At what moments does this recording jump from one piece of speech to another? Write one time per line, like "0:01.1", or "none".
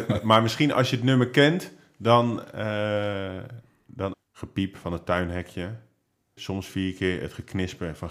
0:04.1
0:06.4